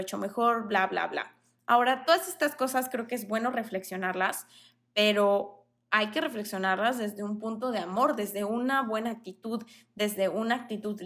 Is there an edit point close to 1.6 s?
no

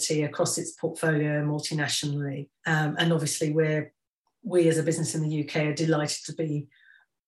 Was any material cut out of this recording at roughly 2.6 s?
yes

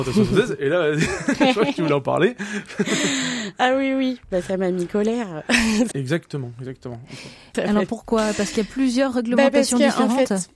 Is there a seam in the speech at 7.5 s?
yes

